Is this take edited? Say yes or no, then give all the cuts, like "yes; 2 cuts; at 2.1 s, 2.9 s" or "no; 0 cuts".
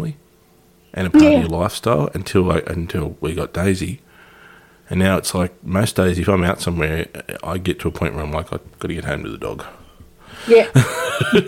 no; 0 cuts